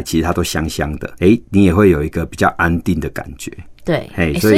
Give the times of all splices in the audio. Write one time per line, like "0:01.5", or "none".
0:01.2